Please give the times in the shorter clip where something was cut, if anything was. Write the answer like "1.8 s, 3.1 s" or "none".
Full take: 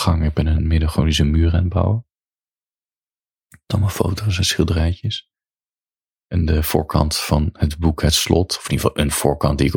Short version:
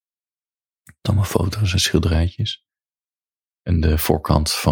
none